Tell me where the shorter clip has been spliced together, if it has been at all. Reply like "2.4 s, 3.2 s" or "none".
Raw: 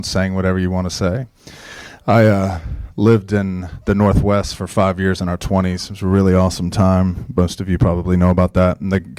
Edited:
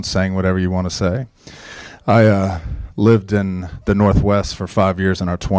none